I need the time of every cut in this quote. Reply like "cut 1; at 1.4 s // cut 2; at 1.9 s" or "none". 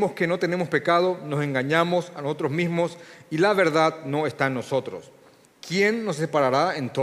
cut 1; at 5.4 s